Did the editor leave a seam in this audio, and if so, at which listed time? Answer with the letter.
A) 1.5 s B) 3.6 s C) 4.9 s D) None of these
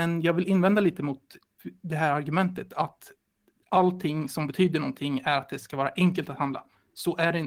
D